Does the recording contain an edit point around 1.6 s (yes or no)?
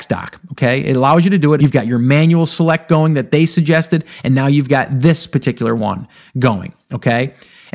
yes